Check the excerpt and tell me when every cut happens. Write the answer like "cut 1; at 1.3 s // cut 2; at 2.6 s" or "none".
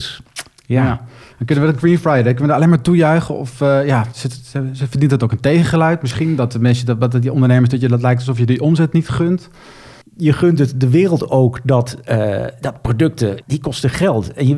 cut 1; at 10.0 s // cut 2; at 13.4 s